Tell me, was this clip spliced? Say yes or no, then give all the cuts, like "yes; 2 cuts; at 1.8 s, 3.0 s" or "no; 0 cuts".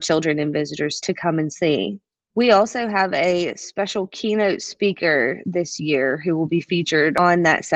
no; 0 cuts